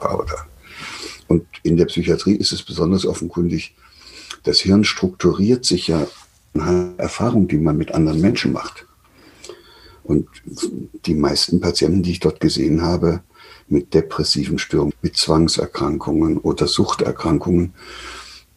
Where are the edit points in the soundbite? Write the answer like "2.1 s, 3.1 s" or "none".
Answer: 14.9 s